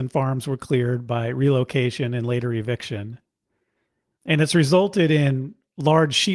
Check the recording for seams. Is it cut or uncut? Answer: uncut